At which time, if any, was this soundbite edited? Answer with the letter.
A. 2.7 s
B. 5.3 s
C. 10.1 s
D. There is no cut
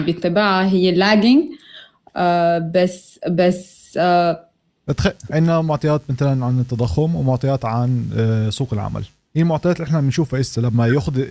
B